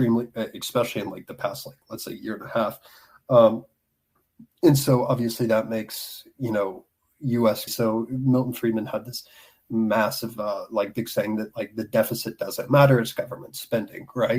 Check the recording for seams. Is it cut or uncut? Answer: cut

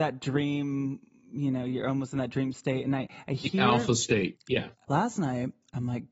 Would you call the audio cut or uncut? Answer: cut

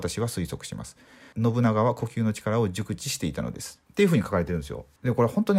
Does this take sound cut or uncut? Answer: uncut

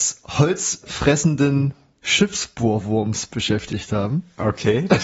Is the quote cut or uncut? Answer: uncut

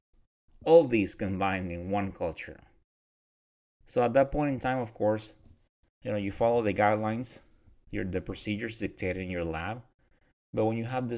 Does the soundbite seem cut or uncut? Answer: uncut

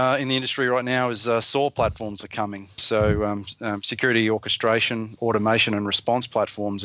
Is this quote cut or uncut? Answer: cut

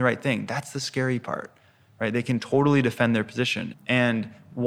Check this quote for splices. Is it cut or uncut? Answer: cut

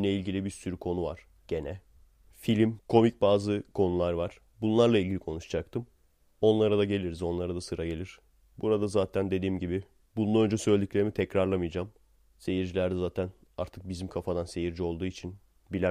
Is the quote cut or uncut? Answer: cut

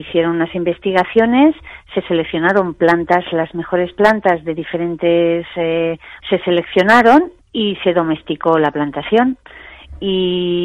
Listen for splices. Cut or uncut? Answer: cut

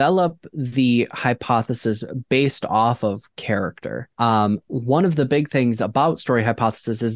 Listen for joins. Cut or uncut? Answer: cut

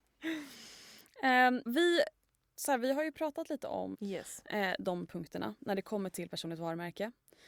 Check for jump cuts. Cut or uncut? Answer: cut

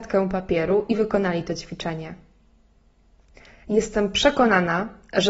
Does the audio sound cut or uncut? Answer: uncut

